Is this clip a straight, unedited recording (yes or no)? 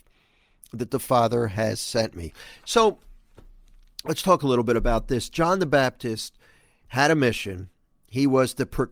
yes